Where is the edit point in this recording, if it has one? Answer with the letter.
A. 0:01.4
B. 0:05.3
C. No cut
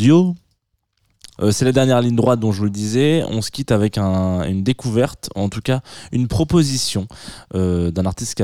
A